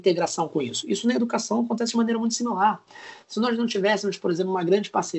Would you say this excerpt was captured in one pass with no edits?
yes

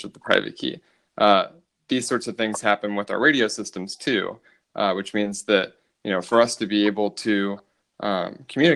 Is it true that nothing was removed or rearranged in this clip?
yes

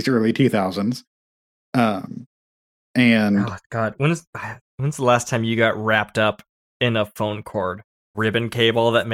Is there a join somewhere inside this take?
yes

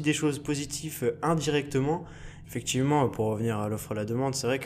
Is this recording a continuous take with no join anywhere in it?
no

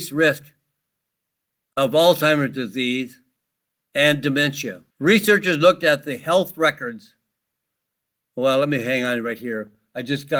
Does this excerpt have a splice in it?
yes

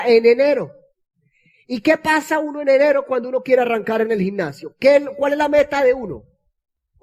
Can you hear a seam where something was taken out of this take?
no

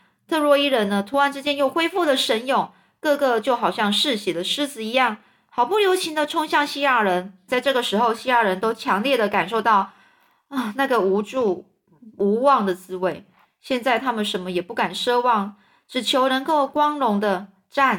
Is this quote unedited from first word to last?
no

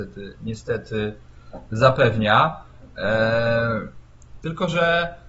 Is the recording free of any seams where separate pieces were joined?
no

